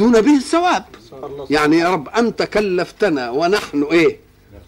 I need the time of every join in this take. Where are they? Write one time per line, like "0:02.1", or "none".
0:01.2